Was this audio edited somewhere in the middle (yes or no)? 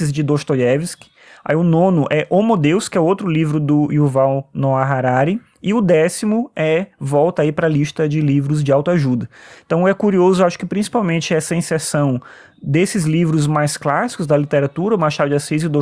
no